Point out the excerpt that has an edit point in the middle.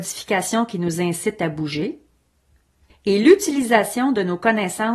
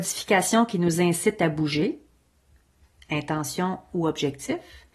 first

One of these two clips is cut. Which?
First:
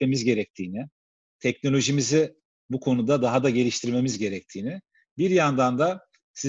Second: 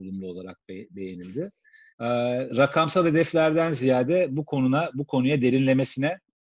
second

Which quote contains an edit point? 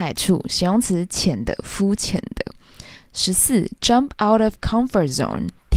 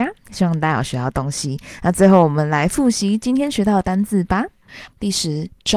second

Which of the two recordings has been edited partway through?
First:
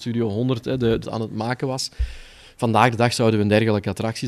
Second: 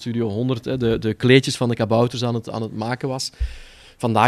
first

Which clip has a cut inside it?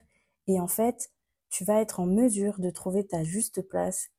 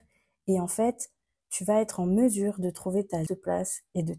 second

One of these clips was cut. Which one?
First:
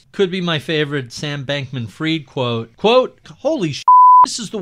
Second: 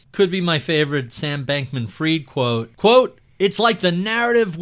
first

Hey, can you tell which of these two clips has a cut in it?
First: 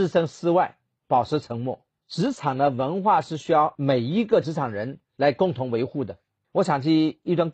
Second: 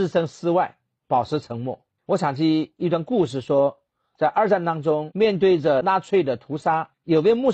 second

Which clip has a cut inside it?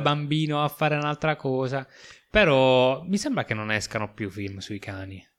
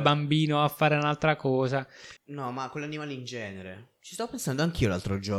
second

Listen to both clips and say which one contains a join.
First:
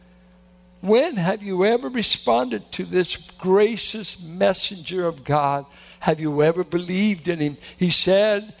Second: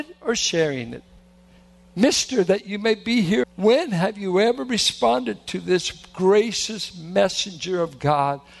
second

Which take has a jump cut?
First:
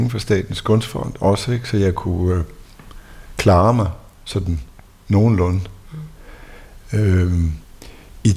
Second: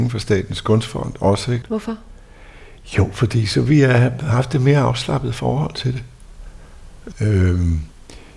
second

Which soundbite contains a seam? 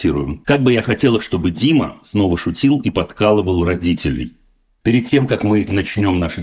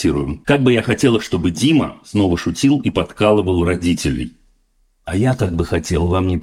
first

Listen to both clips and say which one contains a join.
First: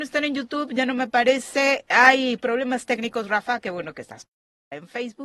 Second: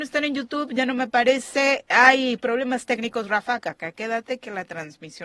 second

